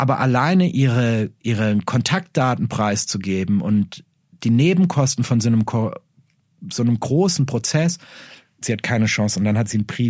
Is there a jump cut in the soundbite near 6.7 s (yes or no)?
no